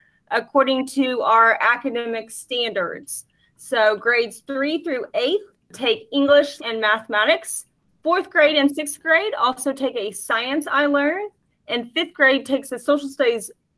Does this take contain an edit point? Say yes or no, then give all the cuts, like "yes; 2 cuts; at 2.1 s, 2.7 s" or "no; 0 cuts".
yes; 1 cut; at 6.6 s